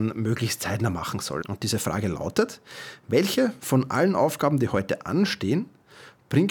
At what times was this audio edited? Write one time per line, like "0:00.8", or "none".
0:01.4